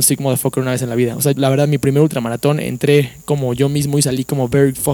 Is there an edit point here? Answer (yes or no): yes